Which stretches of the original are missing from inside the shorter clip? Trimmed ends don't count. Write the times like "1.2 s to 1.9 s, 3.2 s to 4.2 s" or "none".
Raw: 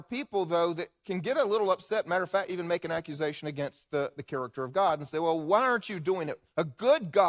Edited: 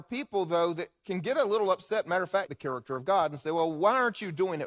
2.5 s to 4.1 s